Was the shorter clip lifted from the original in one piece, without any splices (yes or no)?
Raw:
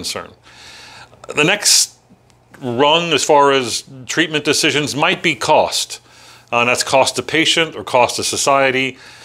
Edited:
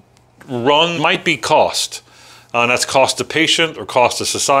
no